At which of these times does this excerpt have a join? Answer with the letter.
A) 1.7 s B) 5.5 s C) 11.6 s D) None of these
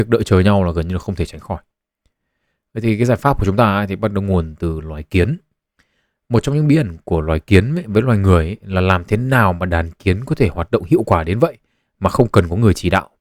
D